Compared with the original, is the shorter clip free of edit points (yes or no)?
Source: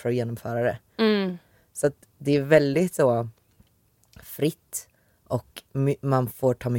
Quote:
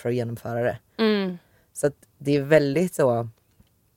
yes